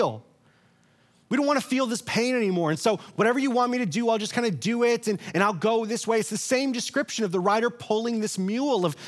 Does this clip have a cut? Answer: no; 0 cuts

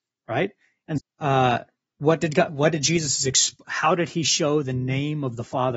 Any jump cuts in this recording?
yes; 1 cut; at 1.0 s

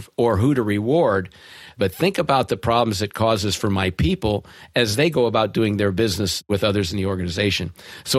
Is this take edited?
yes; 1 cut; at 1.8 s

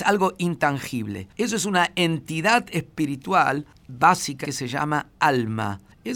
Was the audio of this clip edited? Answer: yes; 1 cut; at 4.4 s

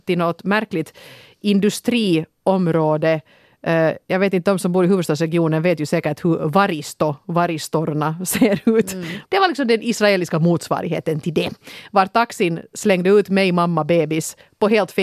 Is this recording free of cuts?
no; 1 cut; at 9.3 s

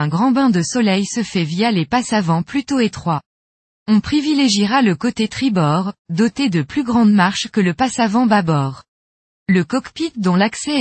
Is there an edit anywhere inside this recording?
no; 0 cuts

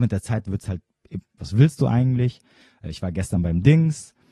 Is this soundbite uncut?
no; 1 cut; at 1.4 s

